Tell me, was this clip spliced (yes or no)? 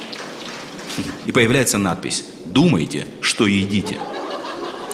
yes